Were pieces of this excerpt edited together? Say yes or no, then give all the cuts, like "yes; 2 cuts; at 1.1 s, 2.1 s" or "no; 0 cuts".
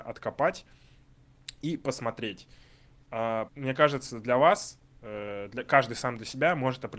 yes; 1 cut; at 3.5 s